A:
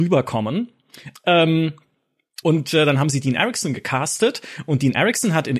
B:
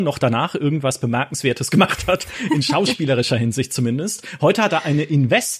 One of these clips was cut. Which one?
A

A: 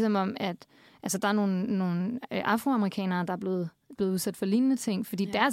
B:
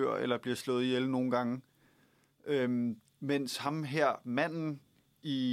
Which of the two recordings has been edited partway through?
A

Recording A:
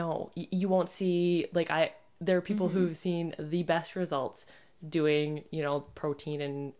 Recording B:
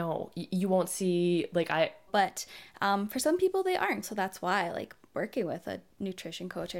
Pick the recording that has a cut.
B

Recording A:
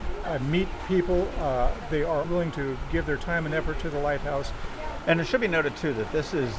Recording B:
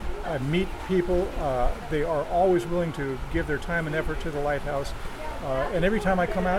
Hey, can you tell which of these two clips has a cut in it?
A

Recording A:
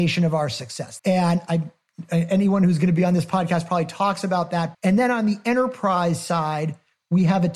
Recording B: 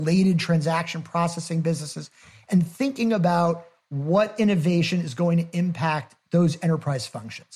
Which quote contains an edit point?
A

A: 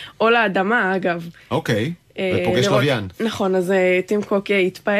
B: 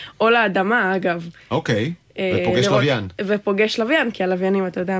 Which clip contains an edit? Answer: A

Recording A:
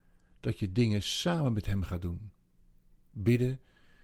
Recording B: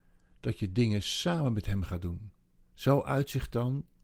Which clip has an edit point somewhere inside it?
B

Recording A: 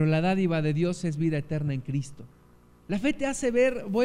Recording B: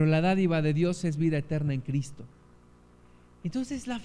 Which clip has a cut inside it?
A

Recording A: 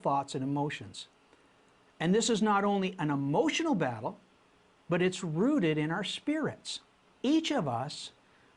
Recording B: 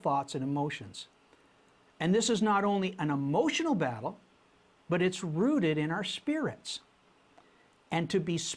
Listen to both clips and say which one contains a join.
A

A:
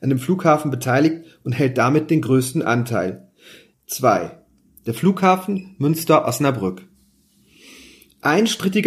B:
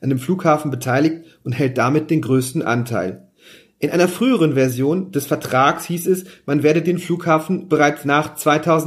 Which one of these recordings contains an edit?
A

